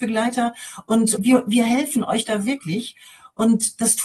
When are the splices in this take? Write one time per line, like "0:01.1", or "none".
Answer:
0:01.2